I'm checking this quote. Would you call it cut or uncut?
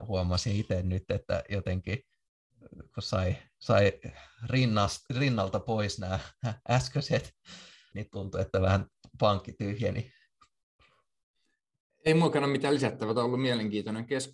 cut